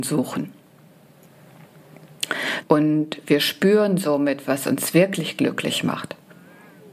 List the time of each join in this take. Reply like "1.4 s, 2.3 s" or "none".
2.6 s

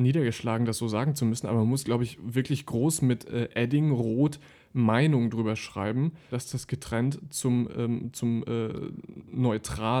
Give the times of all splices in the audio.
6.3 s

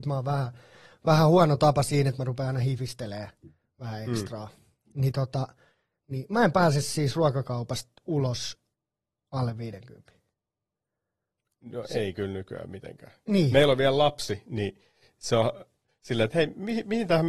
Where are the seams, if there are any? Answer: 16.3 s

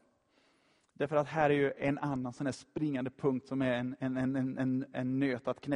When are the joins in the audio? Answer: none

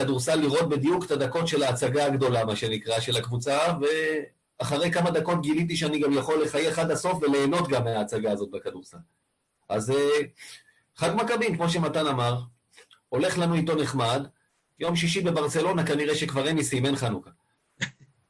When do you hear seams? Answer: 14.8 s

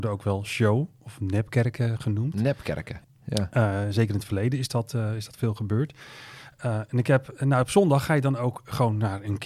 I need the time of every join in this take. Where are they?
3.0 s

